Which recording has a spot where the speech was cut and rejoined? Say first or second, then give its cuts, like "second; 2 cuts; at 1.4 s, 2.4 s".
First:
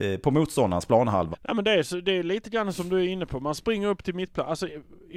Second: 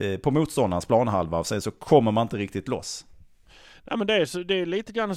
first; 1 cut; at 1.3 s